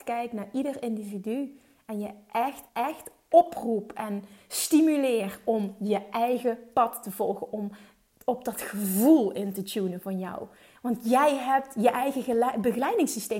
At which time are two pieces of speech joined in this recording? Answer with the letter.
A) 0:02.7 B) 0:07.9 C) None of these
A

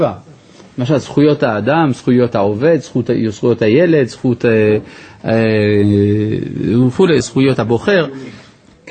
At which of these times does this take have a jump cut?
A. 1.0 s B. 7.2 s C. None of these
B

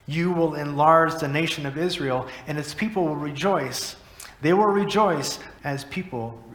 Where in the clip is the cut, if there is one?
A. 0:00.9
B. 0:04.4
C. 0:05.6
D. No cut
C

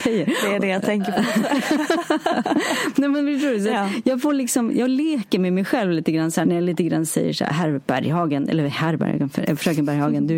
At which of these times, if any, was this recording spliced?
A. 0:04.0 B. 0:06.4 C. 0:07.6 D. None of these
B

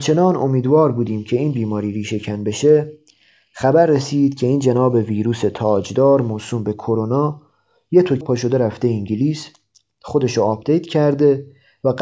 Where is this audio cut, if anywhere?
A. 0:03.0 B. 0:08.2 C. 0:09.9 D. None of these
B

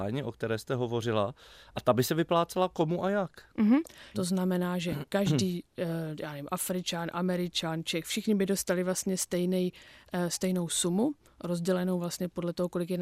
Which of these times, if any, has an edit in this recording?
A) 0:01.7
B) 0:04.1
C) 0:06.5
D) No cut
B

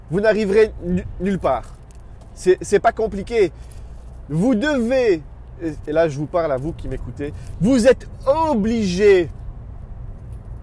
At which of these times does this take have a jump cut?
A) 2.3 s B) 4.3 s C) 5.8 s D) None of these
D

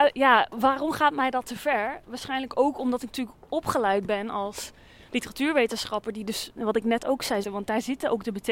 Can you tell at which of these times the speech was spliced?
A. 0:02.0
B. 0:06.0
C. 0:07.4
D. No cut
C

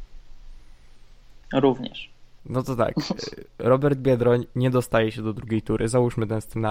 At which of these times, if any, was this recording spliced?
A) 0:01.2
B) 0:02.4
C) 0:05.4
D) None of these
B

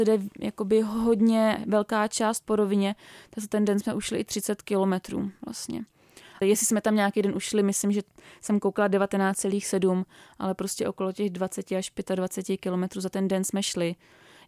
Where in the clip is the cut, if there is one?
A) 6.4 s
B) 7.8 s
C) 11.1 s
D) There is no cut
A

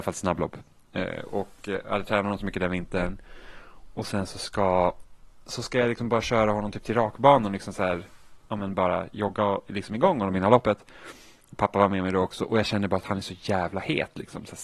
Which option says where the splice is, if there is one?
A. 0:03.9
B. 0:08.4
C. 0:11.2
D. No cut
B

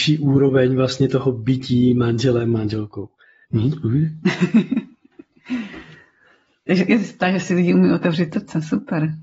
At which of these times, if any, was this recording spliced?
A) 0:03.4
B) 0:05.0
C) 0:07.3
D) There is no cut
A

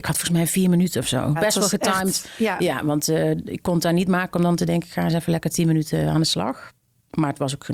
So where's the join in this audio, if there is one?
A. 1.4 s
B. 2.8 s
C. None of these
A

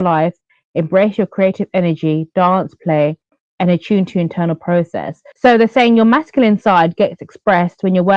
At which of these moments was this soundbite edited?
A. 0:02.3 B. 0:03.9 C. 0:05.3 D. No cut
C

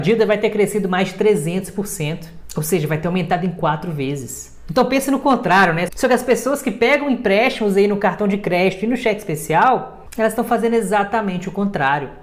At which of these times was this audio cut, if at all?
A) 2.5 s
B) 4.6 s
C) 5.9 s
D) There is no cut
C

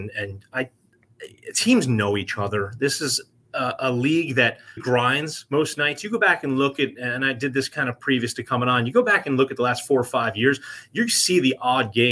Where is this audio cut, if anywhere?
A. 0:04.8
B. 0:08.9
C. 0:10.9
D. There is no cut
A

